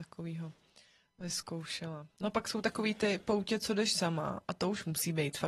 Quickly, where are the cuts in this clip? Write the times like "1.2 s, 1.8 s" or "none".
none